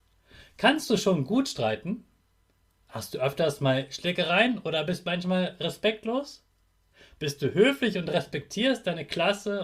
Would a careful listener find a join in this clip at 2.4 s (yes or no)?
no